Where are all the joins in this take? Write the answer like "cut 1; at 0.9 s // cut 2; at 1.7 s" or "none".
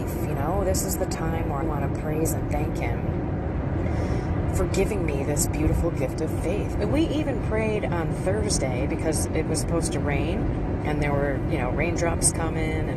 cut 1; at 1.6 s // cut 2; at 6.7 s